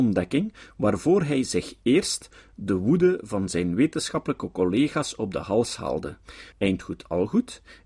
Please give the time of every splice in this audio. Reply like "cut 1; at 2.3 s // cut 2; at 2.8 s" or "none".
cut 1; at 6.5 s